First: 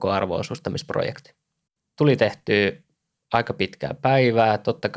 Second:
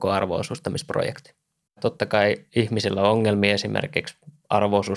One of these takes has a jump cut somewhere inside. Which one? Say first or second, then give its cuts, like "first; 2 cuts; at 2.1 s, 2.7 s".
second; 1 cut; at 1.8 s